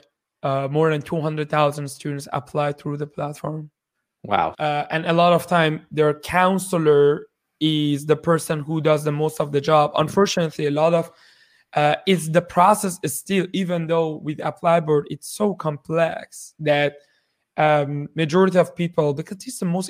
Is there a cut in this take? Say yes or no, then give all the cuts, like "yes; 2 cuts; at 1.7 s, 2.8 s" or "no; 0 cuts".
yes; 1 cut; at 4.5 s